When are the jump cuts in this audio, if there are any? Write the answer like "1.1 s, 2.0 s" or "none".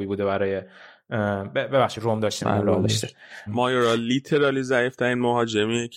3.5 s